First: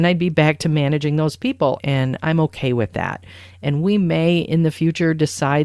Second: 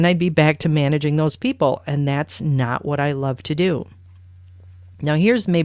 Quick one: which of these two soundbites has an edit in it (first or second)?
first